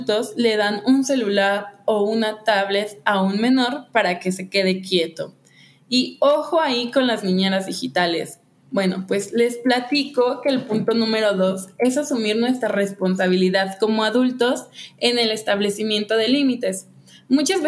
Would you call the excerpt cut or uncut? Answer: uncut